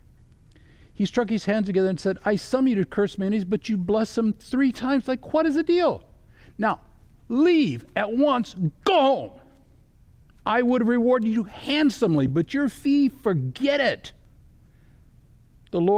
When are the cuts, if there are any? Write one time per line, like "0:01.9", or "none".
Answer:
none